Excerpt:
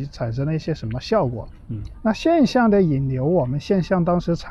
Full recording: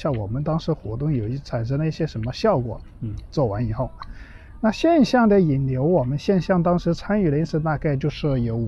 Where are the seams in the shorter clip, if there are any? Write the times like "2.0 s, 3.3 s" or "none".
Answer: 1.9 s